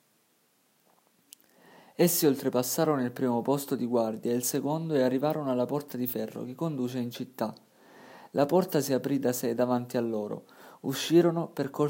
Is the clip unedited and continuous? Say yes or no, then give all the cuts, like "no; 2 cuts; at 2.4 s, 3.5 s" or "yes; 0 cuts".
yes; 0 cuts